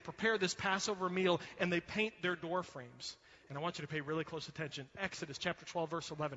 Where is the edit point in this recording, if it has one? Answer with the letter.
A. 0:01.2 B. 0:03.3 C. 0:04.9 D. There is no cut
D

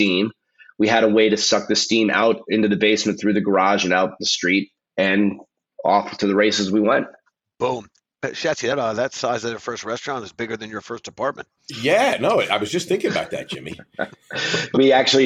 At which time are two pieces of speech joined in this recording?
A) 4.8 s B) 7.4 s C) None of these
A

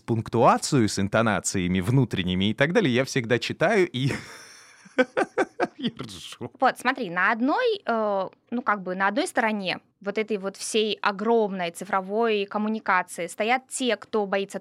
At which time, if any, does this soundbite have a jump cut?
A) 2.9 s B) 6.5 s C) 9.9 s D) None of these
C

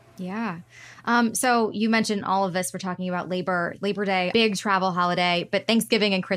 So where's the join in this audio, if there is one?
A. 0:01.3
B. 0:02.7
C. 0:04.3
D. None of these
C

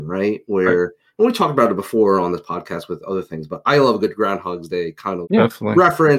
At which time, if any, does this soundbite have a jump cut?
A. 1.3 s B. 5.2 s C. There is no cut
B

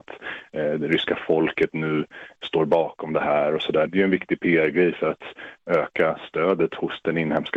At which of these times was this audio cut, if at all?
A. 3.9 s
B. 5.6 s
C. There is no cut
A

